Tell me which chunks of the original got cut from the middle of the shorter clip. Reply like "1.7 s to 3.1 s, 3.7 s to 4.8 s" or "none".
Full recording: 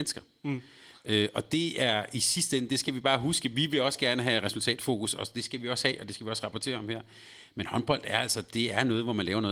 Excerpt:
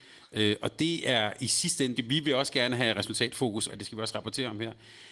2.7 s to 3.4 s, 5.1 s to 6.0 s